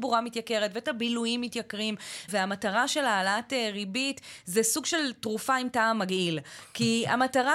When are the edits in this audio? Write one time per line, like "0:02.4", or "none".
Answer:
0:02.3